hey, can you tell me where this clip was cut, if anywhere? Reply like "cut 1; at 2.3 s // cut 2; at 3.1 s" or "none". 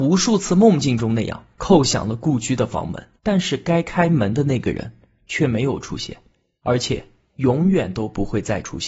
cut 1; at 3.2 s